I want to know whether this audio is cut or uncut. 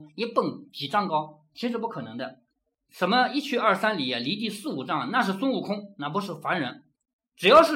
uncut